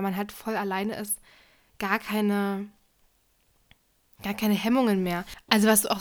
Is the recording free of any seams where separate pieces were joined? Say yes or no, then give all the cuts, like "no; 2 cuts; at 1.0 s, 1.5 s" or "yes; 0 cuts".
yes; 0 cuts